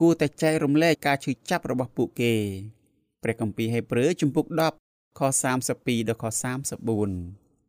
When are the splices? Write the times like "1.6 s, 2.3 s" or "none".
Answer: 1.0 s